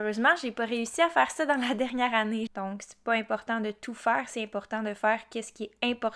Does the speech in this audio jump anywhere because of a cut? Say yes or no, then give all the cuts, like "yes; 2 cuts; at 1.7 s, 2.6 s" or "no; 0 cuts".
yes; 1 cut; at 2.5 s